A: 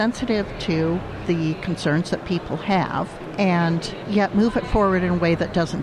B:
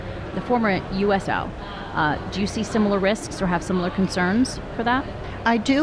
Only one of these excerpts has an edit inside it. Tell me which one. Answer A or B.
B